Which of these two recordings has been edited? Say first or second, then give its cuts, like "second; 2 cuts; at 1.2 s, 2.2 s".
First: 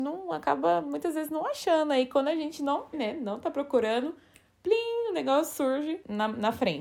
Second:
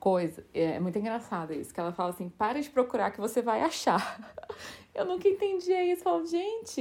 first; 1 cut; at 2.9 s